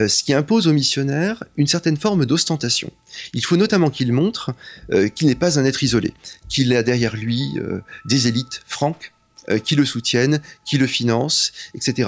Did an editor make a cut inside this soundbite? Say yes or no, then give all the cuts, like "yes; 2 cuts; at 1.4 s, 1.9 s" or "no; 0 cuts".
no; 0 cuts